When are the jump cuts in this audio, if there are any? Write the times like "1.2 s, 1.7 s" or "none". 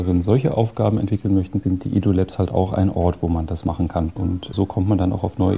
4.2 s